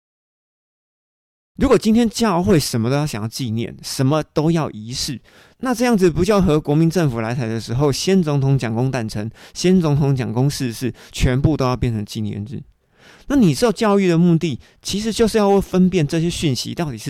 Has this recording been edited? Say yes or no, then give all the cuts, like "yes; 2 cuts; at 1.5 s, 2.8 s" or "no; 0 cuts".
no; 0 cuts